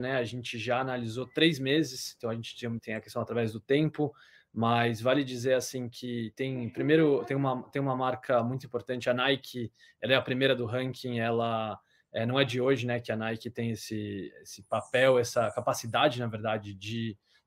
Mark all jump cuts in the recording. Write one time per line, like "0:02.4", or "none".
0:02.8